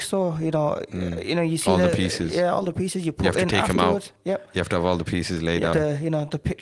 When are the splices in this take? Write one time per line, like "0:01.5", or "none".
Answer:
0:05.7